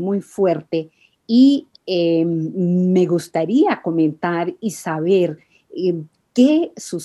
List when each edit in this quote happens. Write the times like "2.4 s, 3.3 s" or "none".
none